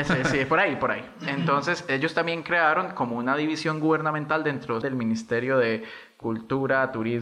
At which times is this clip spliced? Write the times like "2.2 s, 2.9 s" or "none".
4.8 s